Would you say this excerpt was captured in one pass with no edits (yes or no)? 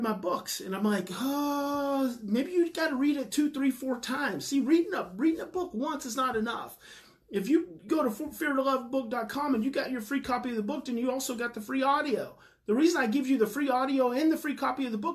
yes